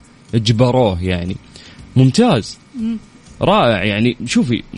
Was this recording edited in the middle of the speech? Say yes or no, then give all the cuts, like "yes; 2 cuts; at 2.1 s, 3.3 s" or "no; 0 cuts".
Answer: no; 0 cuts